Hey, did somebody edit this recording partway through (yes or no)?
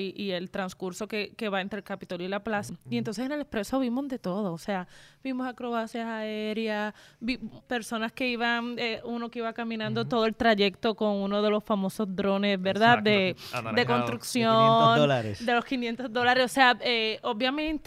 yes